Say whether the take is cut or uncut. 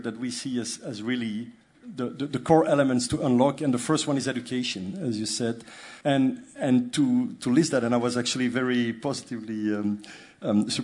cut